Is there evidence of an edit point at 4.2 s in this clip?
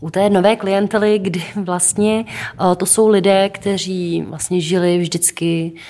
yes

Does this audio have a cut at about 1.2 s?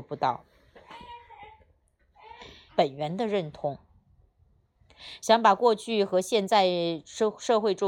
no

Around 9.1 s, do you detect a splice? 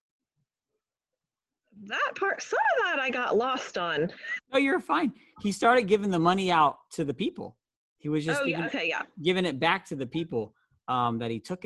no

